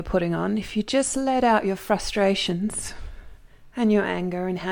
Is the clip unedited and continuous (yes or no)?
yes